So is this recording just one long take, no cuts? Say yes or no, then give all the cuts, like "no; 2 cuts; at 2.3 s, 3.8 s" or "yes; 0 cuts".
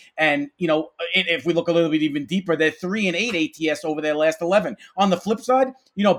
yes; 0 cuts